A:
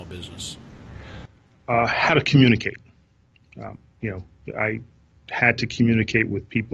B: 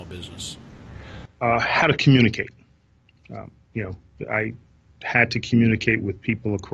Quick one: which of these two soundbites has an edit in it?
B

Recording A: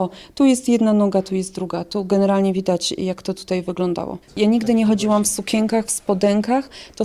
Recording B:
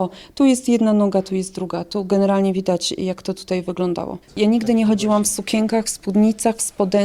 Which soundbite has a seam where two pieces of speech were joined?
A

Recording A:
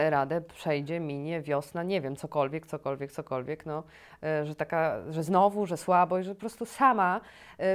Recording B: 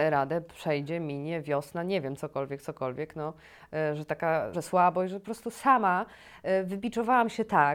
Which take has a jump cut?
B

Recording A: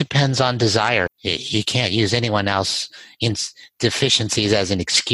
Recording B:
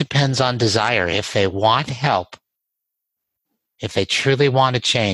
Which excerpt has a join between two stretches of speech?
A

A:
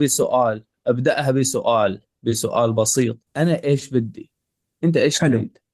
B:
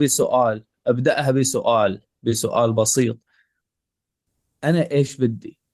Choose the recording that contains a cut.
A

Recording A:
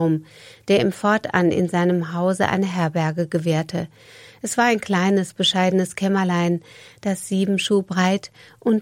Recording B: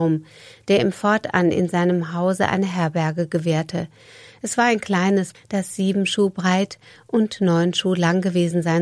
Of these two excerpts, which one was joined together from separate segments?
B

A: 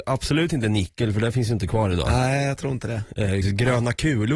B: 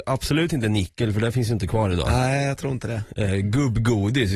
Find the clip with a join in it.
A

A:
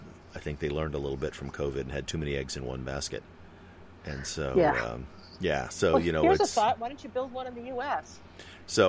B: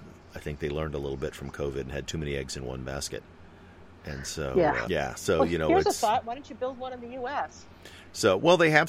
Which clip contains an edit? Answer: B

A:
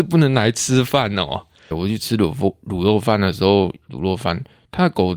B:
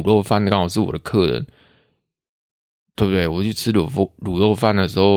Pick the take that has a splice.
A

